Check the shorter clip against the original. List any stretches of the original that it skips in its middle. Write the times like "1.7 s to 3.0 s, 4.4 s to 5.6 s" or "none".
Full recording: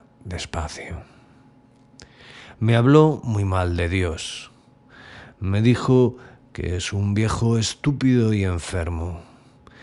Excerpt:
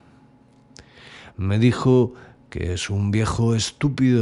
2.5 s to 5.3 s